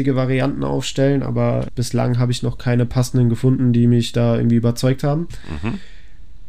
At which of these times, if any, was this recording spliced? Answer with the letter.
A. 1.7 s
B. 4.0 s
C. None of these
A